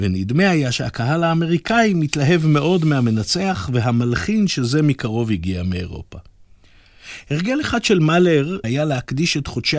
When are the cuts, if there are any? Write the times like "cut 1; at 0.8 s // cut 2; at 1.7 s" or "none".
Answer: cut 1; at 8.6 s